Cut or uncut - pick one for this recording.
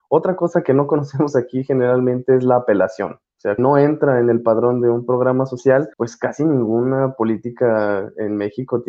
cut